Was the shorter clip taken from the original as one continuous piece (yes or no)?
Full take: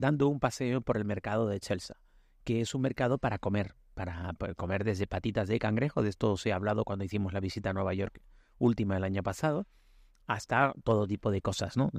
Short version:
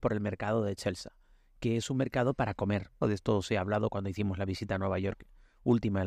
no